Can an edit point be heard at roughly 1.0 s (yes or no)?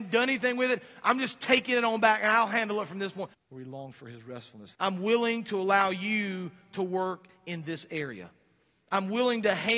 no